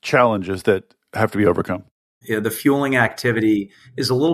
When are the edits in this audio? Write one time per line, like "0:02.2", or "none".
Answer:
0:02.2